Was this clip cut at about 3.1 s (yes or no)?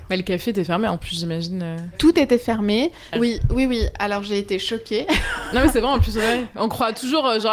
yes